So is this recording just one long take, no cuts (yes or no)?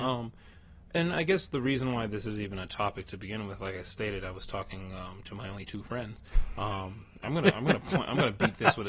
yes